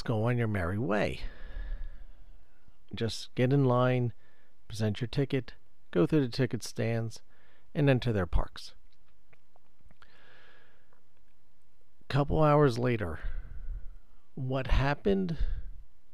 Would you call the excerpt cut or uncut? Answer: cut